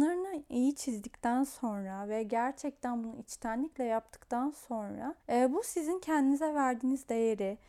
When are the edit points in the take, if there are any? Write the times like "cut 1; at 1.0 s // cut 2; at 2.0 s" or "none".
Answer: cut 1; at 5.2 s